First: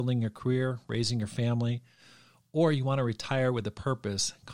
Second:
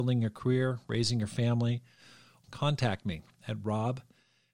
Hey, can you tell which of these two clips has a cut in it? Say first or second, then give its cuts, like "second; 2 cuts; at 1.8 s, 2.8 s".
second; 1 cut; at 2.4 s